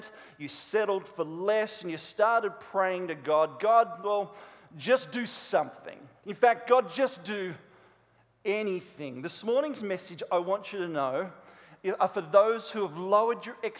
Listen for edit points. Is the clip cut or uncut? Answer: uncut